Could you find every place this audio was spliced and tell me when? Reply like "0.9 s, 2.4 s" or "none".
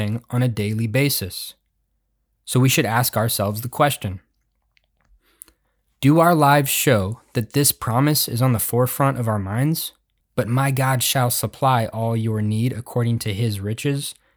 10.2 s